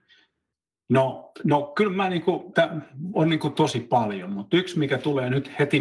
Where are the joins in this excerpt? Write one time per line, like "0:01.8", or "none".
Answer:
0:02.5